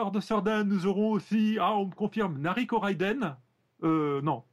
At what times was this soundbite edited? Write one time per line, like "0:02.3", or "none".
none